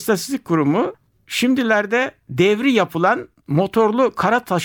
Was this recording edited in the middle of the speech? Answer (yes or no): no